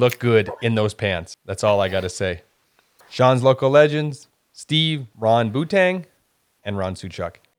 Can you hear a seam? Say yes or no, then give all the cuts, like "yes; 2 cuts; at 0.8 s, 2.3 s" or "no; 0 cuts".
yes; 1 cut; at 3.0 s